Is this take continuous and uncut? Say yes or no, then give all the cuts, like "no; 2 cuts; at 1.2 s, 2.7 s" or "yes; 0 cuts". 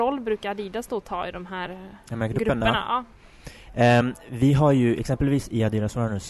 yes; 0 cuts